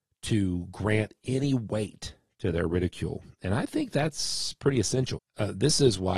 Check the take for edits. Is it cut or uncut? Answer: cut